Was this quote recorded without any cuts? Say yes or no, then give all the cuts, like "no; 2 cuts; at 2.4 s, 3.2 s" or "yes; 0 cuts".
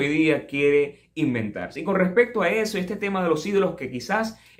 yes; 0 cuts